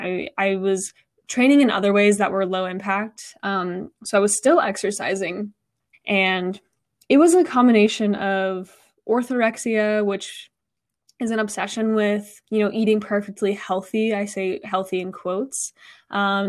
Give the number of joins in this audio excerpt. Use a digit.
2